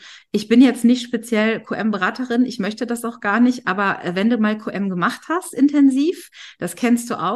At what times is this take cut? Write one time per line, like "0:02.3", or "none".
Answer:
none